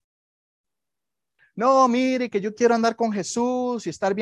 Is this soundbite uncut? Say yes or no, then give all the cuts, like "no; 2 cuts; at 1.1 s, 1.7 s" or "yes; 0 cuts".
no; 1 cut; at 1.4 s